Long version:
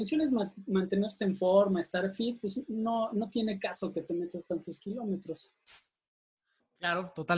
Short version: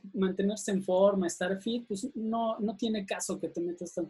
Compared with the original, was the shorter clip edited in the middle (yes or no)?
no